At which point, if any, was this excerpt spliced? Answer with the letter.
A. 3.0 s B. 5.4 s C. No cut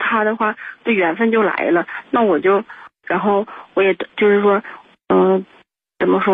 A